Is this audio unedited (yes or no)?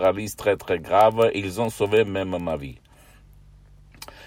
yes